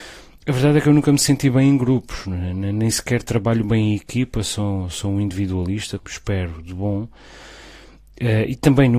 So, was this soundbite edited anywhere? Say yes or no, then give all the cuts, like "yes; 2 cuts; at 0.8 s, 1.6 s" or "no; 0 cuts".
yes; 1 cut; at 6.0 s